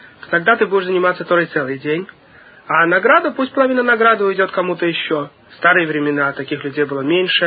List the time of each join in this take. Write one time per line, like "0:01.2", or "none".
0:05.5